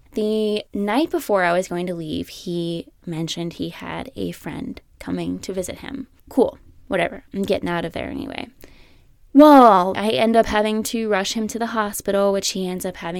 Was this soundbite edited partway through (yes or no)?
yes